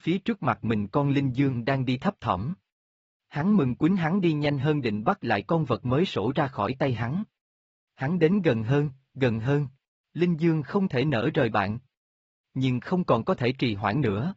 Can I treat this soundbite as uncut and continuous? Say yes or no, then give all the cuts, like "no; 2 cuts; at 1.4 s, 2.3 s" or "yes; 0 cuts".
no; 1 cut; at 10.0 s